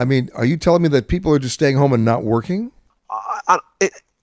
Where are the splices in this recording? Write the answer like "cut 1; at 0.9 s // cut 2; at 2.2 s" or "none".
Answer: cut 1; at 2.9 s